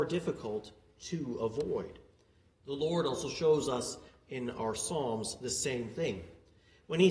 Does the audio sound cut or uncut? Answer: cut